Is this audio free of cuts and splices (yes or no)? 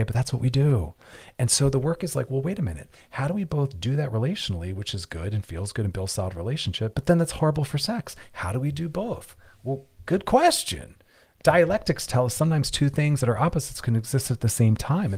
no